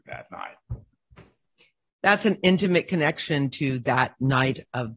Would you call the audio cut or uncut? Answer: uncut